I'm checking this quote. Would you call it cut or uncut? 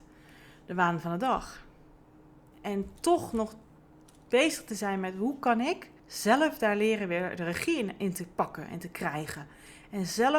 cut